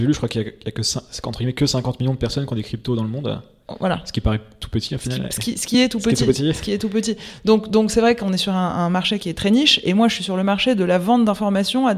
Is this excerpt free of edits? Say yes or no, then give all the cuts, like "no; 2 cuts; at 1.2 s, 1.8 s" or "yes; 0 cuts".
yes; 0 cuts